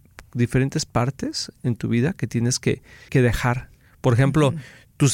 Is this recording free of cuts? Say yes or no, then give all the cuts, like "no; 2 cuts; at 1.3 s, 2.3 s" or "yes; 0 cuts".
no; 1 cut; at 3.1 s